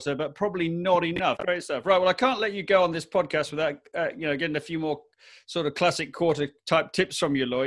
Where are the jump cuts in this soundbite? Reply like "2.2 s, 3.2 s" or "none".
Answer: 1.4 s